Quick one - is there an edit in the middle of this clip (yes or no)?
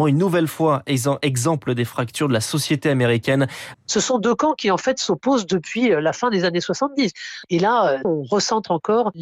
yes